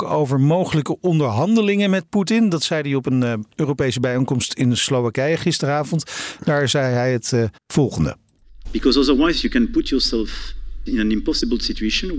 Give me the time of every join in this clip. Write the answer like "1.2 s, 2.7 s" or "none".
7.6 s, 8.6 s, 10.9 s